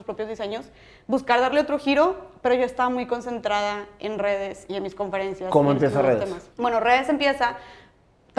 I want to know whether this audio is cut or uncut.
cut